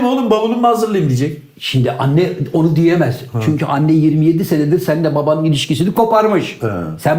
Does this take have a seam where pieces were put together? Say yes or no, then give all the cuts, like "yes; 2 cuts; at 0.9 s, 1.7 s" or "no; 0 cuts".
no; 0 cuts